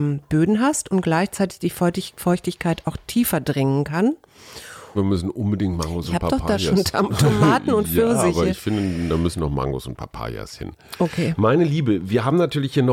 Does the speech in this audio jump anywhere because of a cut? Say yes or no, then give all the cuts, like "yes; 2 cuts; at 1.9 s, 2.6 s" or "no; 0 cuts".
yes; 1 cut; at 4.9 s